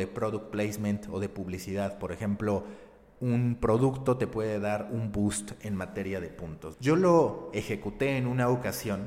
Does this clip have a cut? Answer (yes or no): yes